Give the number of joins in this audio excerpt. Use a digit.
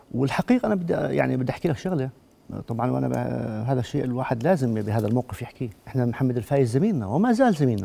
0